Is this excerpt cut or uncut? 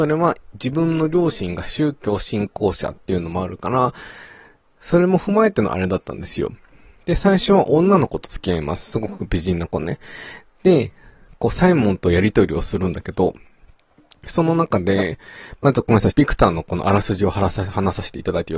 cut